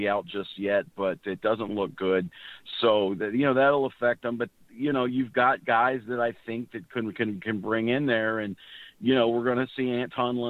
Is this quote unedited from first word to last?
yes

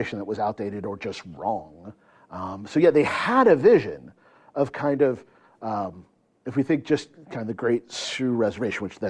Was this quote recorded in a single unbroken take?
yes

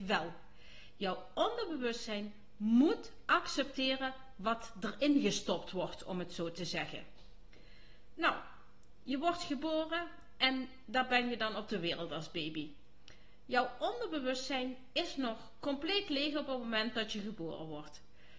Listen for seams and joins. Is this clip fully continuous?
yes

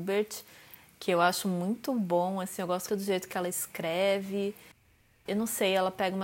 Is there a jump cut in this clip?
yes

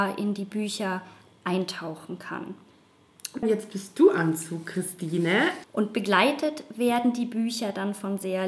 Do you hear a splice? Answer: yes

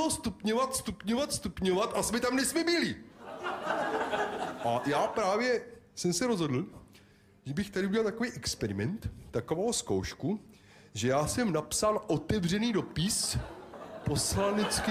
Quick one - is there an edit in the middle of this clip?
no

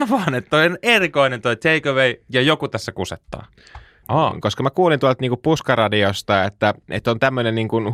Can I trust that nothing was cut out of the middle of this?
no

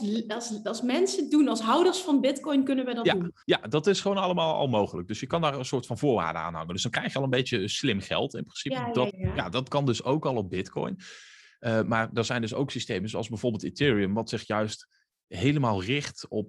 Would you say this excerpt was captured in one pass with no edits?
no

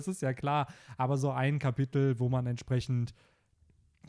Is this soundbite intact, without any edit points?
yes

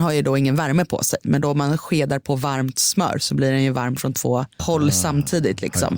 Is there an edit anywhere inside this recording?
yes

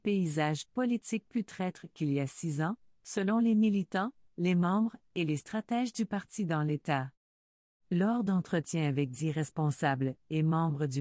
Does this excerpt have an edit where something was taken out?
no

